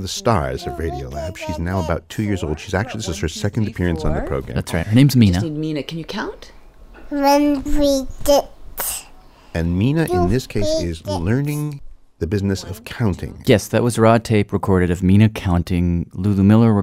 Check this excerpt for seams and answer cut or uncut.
cut